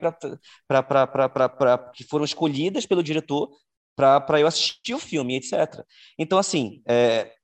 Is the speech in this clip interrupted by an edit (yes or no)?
no